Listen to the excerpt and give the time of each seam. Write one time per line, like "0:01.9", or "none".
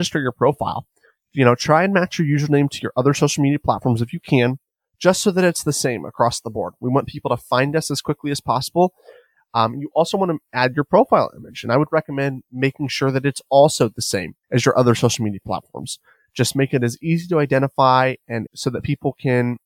0:09.4
0:14.4
0:18.5